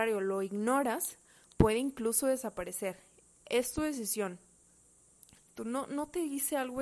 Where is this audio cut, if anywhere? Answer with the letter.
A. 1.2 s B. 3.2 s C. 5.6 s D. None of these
C